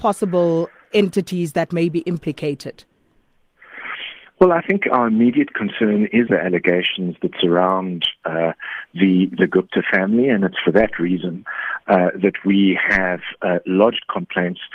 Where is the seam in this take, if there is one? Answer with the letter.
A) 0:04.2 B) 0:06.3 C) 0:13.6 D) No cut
B